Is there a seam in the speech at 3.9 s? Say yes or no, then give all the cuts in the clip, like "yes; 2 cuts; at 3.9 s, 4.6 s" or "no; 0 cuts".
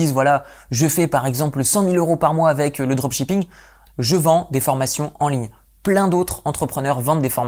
yes; 1 cut; at 3.9 s